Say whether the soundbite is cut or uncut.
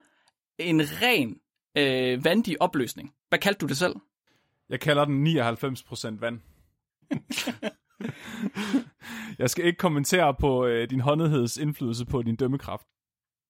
cut